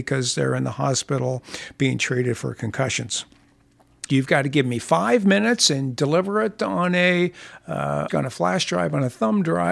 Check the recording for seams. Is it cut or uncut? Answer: cut